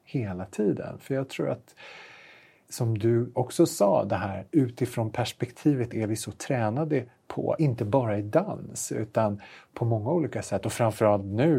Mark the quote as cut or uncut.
uncut